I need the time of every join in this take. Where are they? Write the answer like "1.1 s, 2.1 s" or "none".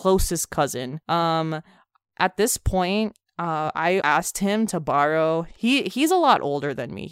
1.0 s, 4.0 s